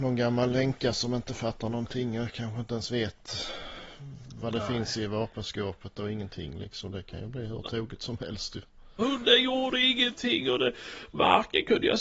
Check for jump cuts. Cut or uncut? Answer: cut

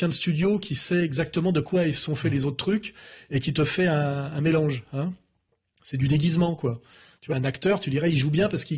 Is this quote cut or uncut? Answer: cut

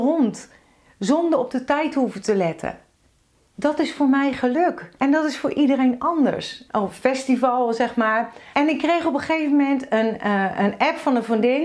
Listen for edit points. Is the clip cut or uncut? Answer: cut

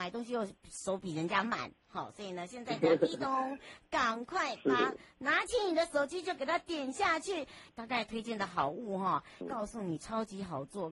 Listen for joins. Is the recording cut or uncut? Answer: cut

